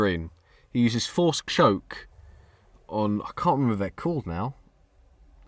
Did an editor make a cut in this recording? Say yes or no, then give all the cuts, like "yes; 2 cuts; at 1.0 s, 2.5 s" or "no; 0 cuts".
no; 0 cuts